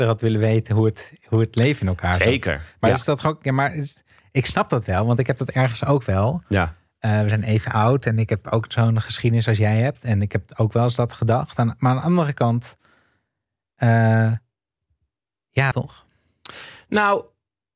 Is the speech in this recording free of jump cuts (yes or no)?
no